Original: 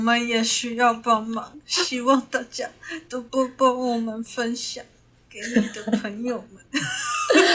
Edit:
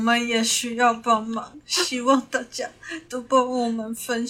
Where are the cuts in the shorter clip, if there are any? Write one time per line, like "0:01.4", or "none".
0:03.3

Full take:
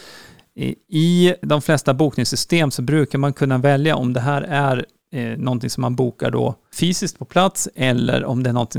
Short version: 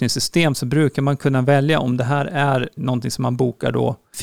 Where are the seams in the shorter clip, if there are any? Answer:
0:02.8

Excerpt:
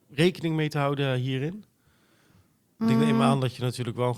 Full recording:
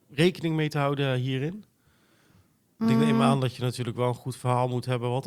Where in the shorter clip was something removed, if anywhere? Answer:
none

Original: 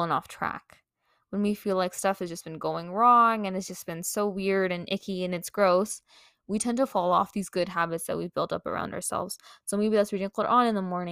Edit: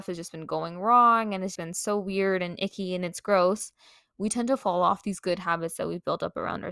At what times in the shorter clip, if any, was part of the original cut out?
0:01.6

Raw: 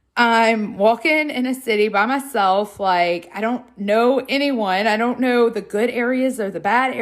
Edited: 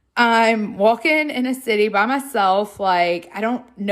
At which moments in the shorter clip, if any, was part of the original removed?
none

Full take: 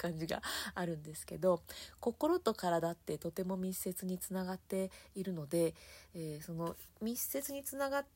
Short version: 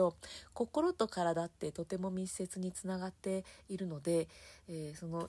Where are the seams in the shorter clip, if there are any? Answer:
none

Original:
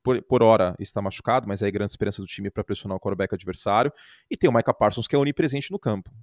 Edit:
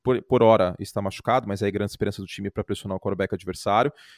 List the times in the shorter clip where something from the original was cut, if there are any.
none

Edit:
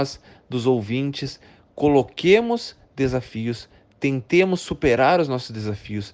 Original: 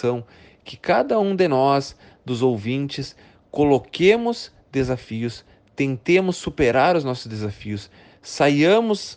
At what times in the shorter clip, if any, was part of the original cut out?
none

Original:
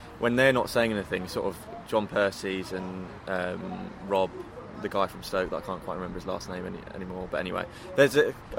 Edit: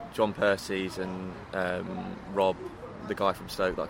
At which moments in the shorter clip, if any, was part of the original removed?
none

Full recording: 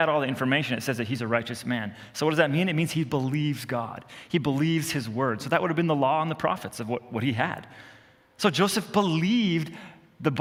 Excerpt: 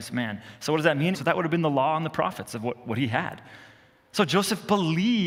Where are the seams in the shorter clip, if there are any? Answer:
0:01.1

